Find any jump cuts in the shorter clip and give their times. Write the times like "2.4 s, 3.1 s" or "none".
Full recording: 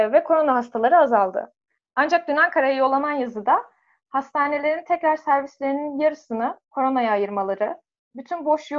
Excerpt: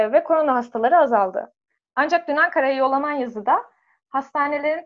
none